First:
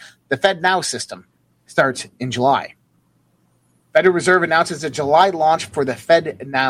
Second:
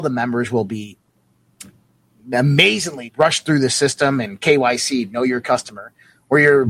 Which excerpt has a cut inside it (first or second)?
second